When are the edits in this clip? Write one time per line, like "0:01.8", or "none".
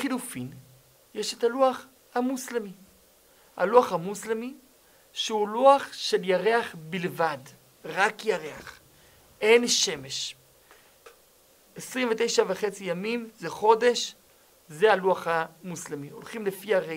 none